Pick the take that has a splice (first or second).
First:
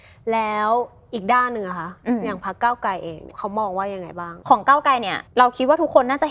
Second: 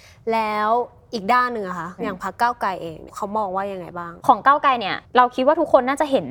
second